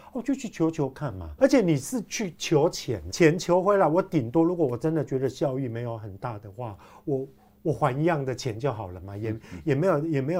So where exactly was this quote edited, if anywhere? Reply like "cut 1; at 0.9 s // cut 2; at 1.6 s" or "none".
cut 1; at 1.4 s // cut 2; at 3.1 s